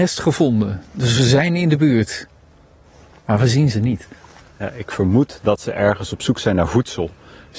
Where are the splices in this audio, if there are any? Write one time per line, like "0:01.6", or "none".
none